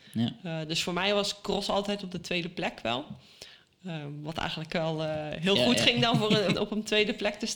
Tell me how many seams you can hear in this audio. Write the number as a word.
one